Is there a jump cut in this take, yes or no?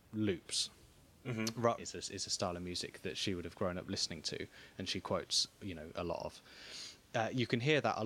yes